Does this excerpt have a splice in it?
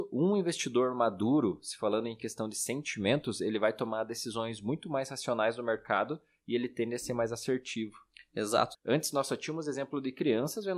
yes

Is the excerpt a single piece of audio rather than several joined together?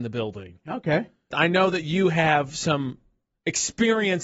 no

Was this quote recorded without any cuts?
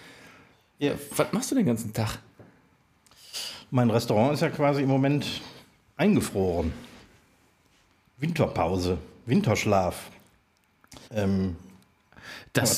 no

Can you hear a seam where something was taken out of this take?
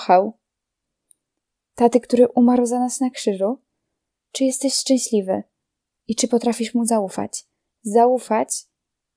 yes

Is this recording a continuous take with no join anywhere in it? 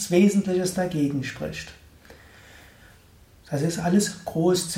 yes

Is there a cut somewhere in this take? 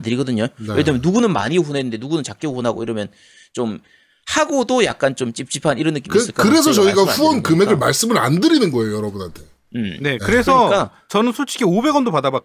no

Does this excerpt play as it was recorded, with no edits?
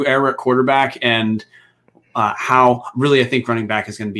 yes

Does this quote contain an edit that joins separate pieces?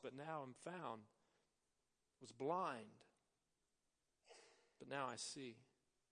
no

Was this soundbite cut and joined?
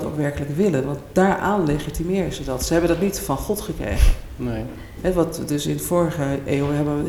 no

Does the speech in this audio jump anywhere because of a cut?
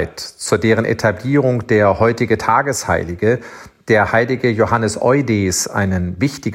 no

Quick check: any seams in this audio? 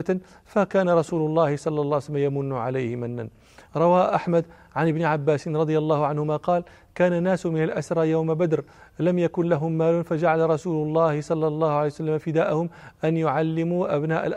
no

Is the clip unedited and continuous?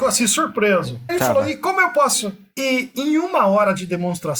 no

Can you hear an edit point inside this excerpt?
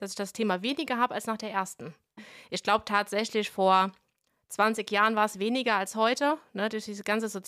yes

